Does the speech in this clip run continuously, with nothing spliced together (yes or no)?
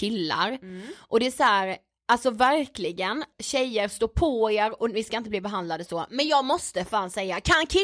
no